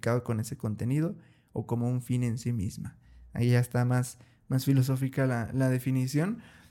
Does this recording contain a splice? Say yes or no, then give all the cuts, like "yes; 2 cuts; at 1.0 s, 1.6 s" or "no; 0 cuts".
no; 0 cuts